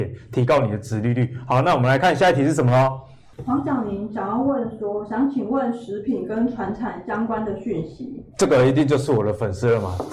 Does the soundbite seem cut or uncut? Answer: cut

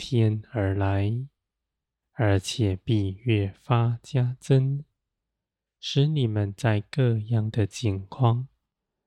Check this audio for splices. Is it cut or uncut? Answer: uncut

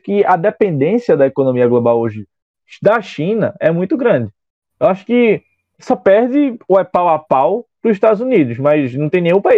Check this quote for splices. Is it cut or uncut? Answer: uncut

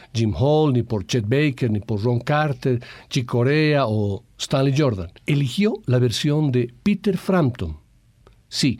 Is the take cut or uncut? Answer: cut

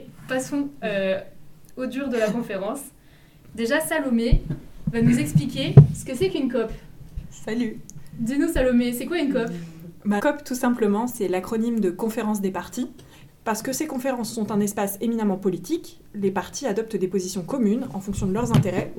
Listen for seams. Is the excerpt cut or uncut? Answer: cut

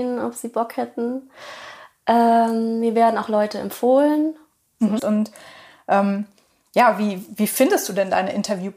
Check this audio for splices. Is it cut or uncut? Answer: cut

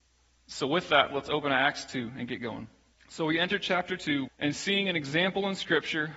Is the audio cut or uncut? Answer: cut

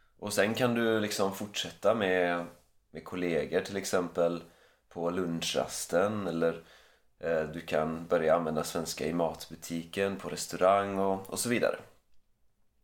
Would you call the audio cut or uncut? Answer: uncut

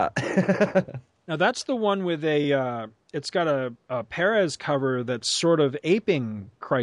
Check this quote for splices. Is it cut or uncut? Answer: uncut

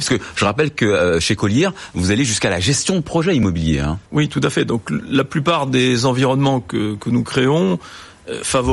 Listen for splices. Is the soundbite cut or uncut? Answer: cut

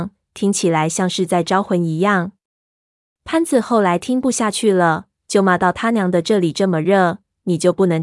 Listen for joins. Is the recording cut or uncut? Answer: uncut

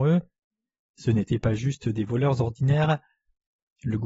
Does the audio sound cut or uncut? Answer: uncut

